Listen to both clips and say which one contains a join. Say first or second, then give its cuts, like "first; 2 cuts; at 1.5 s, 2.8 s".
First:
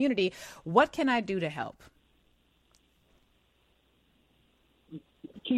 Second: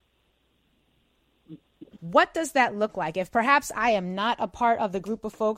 second; 1 cut; at 2.0 s